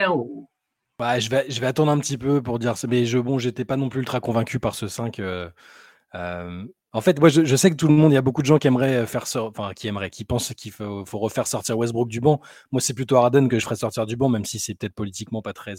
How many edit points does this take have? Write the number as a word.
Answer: zero